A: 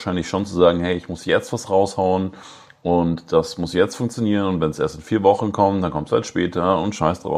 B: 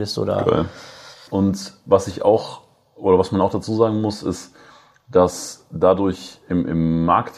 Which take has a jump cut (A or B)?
B